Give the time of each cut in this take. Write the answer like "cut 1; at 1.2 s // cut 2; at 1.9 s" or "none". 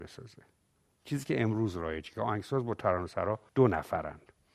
cut 1; at 3.5 s